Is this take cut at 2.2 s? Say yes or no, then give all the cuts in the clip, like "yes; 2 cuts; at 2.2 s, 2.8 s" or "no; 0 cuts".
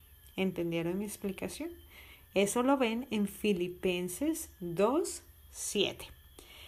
no; 0 cuts